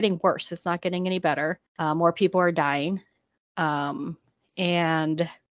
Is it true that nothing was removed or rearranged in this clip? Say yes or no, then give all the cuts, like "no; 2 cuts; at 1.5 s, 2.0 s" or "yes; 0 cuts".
yes; 0 cuts